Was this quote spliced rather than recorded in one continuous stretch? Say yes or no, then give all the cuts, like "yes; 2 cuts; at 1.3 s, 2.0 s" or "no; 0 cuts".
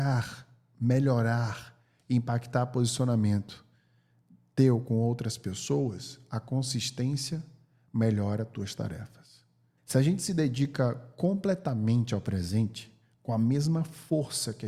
yes; 1 cut; at 9.8 s